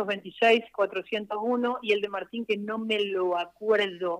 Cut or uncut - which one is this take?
uncut